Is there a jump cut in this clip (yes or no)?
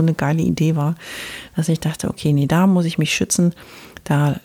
no